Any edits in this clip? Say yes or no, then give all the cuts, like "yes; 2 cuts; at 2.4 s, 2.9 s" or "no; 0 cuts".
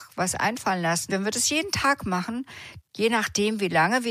yes; 2 cuts; at 1.1 s, 2.8 s